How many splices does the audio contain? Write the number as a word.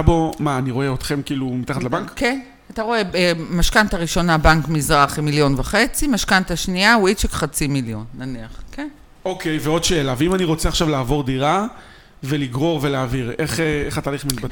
zero